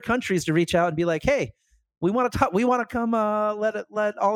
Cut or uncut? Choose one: uncut